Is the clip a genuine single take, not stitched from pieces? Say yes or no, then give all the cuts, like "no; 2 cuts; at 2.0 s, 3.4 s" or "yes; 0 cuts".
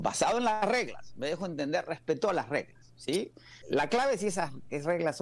no; 1 cut; at 3.6 s